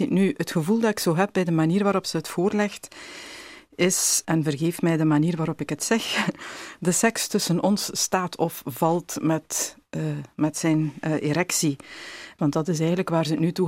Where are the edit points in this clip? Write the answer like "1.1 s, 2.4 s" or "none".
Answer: 4.2 s, 12.4 s